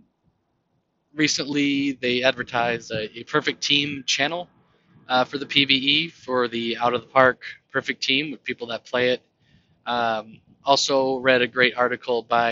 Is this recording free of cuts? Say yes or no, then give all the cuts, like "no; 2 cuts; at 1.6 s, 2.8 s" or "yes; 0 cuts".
yes; 0 cuts